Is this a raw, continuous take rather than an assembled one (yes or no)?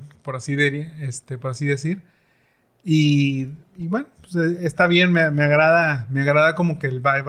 yes